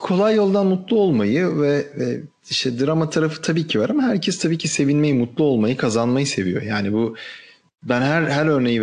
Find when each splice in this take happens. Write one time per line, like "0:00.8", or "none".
none